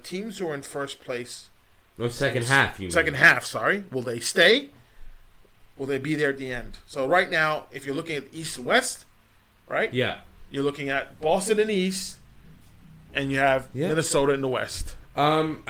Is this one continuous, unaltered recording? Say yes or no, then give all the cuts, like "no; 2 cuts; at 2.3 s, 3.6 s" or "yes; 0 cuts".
yes; 0 cuts